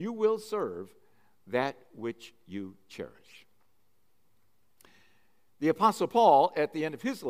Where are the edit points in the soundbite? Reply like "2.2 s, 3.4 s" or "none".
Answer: none